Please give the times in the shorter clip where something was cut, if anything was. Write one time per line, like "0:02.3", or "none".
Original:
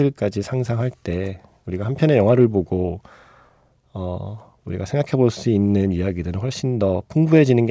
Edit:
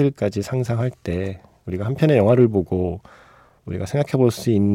0:03.6